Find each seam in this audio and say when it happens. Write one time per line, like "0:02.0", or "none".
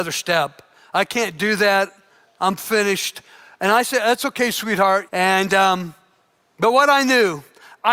0:05.1